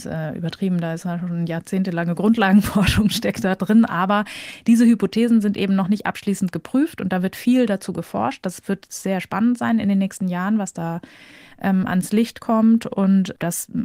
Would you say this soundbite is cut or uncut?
uncut